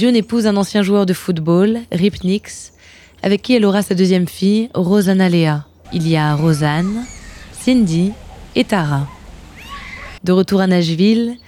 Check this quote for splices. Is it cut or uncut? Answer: cut